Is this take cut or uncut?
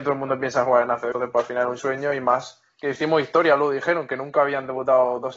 cut